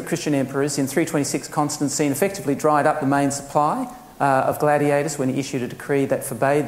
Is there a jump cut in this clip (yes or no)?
no